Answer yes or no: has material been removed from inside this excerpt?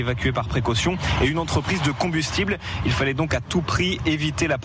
no